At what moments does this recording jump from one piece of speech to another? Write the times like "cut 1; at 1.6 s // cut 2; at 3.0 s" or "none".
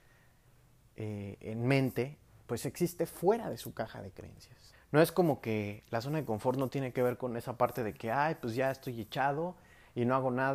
cut 1; at 4.7 s